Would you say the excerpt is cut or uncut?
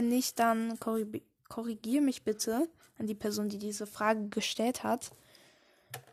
uncut